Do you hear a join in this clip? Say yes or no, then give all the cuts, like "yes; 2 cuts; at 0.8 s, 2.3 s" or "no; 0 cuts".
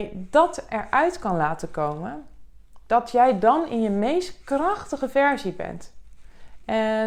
no; 0 cuts